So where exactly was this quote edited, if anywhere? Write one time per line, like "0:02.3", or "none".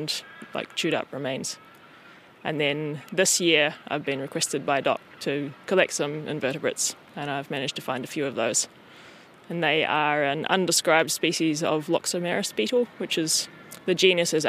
none